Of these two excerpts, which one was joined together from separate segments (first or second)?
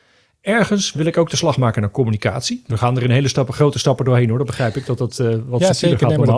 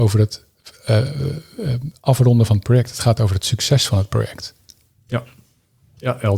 first